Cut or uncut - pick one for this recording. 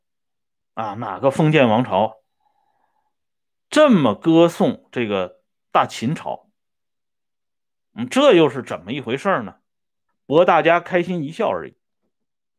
cut